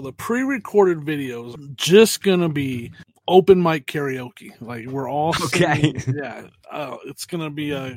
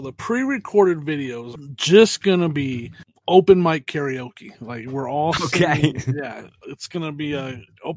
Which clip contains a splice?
second; 1 cut; at 6.6 s

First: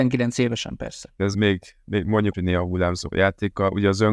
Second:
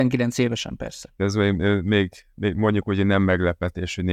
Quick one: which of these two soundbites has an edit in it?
first; 2 cuts; at 1.3 s, 2.3 s

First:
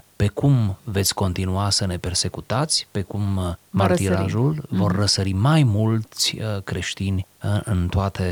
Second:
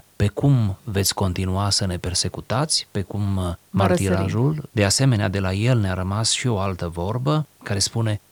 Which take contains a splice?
second; 1 cut; at 4.7 s

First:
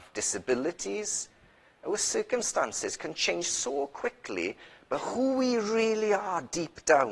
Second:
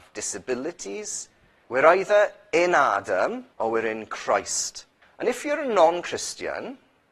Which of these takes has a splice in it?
second; 3 cuts; at 1.6 s, 3.5 s, 5.0 s

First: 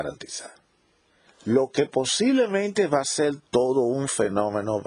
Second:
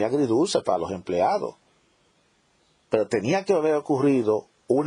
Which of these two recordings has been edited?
first; 1 cut; at 1.3 s

